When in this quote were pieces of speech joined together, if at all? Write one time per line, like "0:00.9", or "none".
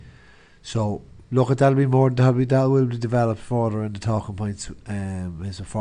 none